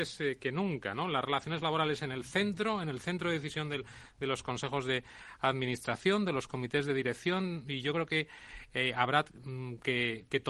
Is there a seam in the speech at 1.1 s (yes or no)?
no